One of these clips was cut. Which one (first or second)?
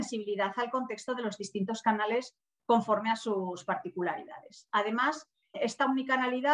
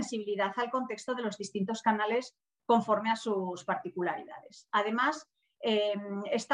first